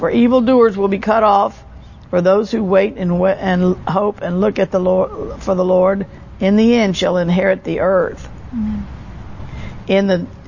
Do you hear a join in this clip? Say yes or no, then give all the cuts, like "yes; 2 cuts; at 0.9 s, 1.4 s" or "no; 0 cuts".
no; 0 cuts